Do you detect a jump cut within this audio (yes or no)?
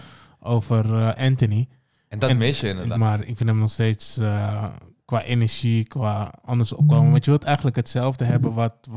yes